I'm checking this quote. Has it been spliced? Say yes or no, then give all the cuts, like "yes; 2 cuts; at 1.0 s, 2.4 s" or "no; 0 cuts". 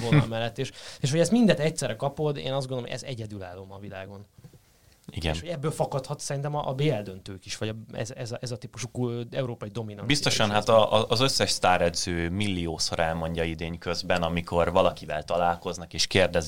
no; 0 cuts